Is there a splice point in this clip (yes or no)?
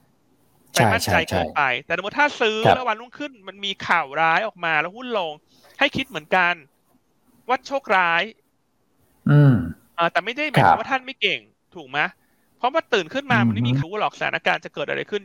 yes